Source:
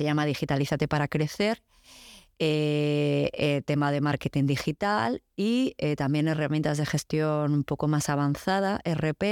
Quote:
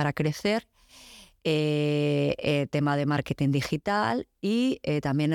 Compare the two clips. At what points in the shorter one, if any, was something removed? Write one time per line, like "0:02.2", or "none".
none